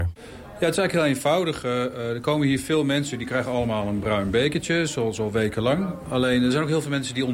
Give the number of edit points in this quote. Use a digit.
0